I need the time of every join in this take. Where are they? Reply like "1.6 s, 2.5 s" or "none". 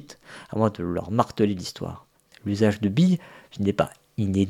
2.3 s